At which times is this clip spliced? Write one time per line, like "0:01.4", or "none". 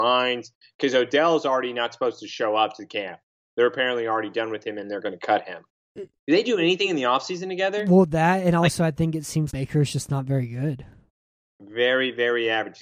0:05.9
0:09.5
0:11.5